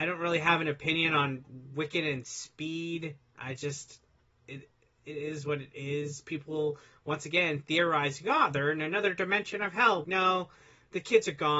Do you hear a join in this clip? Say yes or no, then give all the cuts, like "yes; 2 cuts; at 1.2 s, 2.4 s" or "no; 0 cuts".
yes; 1 cut; at 10.0 s